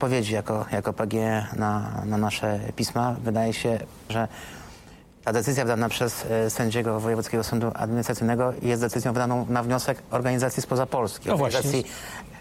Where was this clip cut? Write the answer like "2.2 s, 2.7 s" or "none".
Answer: 4.1 s